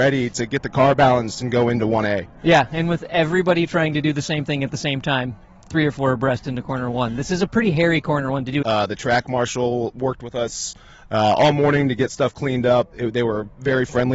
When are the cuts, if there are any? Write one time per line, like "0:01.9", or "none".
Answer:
0:08.6
0:12.9